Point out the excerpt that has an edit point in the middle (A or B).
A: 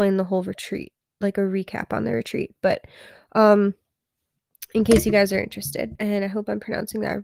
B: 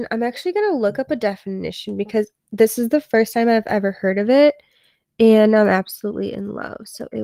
A